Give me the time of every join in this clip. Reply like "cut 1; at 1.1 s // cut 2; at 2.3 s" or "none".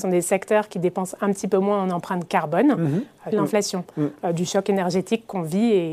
cut 1; at 3.3 s